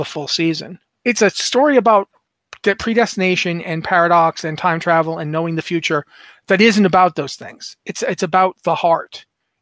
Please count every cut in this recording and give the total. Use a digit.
1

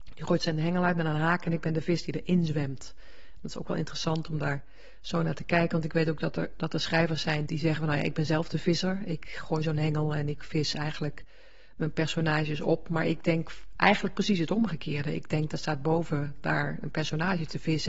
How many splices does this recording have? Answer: 1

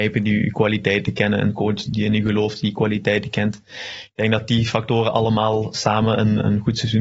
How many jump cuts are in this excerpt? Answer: 1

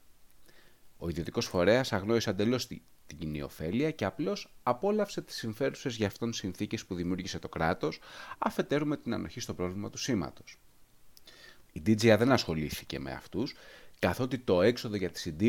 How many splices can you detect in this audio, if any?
2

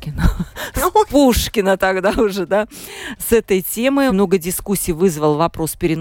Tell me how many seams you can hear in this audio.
1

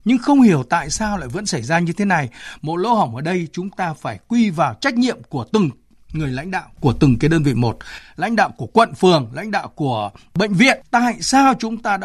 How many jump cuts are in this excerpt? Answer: 1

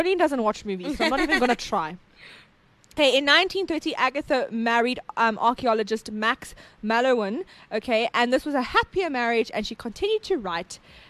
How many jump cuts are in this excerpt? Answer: 0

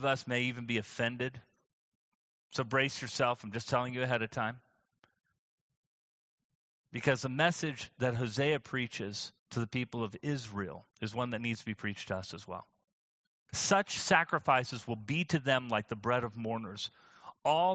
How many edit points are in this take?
2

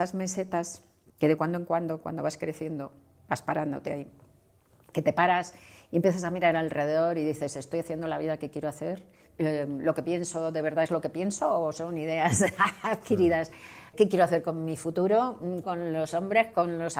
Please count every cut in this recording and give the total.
2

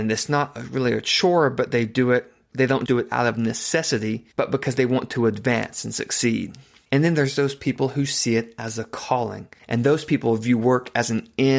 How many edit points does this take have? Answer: 1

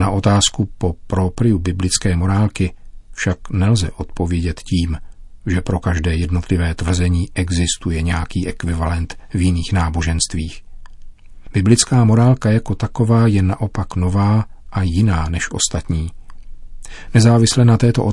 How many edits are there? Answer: 1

